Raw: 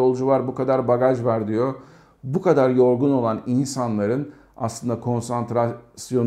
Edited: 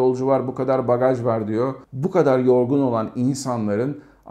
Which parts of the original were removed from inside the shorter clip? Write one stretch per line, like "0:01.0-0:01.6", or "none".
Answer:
0:01.8-0:02.1